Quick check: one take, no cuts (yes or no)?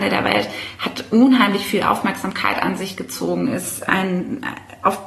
yes